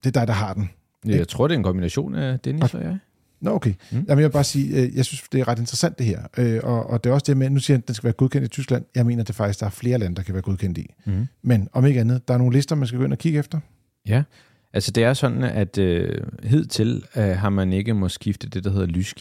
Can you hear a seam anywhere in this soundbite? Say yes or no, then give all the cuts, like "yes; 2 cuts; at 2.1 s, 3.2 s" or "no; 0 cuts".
no; 0 cuts